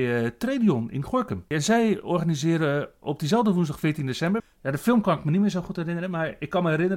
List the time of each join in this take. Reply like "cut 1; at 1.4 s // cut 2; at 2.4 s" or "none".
cut 1; at 1.5 s // cut 2; at 4.4 s